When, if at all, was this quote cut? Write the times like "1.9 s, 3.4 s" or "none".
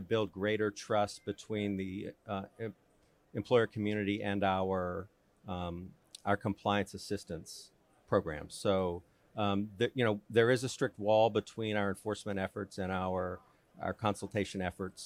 none